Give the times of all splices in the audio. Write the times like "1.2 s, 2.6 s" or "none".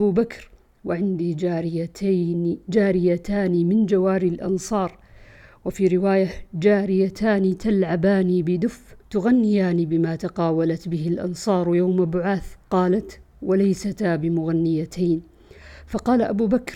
9.0 s, 12.6 s